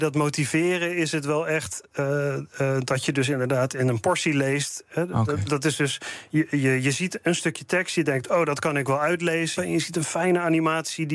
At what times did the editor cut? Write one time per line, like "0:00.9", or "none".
0:09.6